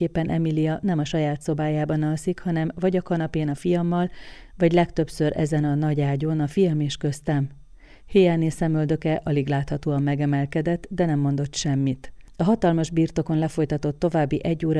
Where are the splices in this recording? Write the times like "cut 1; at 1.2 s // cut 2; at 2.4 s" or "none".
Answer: none